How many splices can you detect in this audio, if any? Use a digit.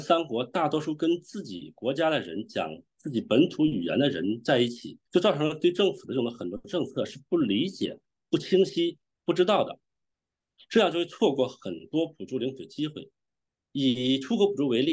1